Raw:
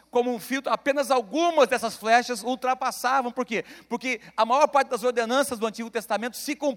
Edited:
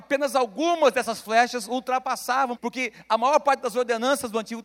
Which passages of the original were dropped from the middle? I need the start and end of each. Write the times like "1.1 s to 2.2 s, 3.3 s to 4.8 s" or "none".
3.3 s to 3.8 s